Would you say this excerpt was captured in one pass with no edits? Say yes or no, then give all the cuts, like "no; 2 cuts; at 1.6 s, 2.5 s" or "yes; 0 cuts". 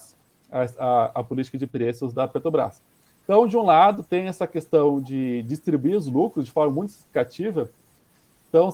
yes; 0 cuts